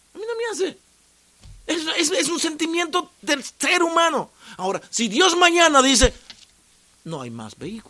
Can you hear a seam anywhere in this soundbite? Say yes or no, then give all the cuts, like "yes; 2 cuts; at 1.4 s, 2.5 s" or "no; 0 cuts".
no; 0 cuts